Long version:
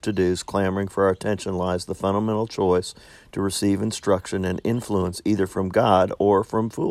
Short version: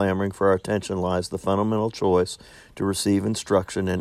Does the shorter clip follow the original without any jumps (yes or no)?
yes